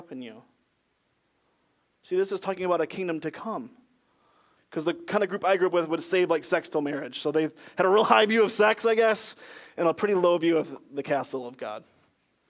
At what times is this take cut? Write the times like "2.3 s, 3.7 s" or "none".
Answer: 4.6 s